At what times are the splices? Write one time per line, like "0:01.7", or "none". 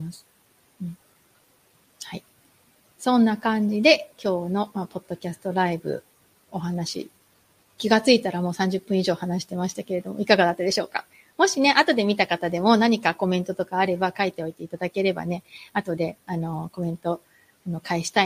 none